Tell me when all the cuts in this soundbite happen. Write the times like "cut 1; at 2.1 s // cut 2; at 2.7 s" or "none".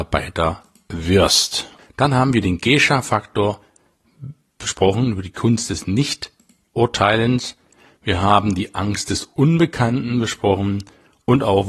cut 1; at 1.8 s

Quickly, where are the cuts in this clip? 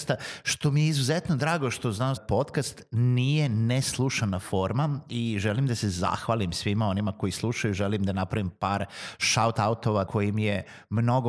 cut 1; at 2.2 s // cut 2; at 10.1 s

